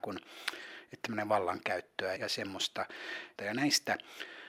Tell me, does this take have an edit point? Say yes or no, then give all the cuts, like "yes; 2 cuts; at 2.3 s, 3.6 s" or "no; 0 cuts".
yes; 2 cuts; at 2.2 s, 3.4 s